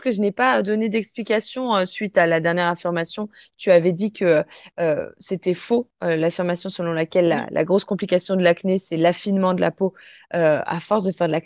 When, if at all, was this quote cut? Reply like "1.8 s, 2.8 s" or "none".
none